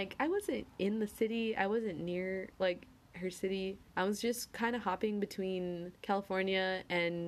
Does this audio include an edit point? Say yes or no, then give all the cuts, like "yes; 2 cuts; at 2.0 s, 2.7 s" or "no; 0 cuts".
yes; 2 cuts; at 3.9 s, 6.0 s